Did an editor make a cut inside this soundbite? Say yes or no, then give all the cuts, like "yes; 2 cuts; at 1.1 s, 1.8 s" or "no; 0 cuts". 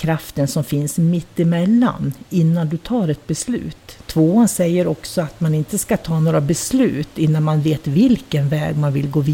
yes; 1 cut; at 4.0 s